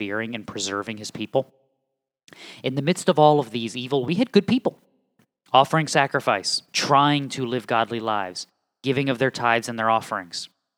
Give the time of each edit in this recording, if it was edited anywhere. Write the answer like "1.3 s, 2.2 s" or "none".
4.0 s, 6.7 s